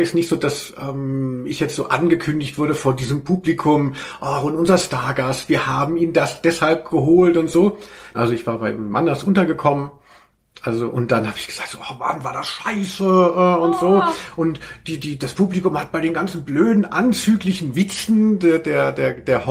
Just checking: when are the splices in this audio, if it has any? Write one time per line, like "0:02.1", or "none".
0:08.1